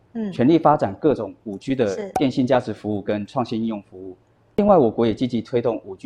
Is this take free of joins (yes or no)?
yes